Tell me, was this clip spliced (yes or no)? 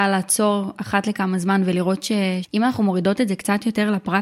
yes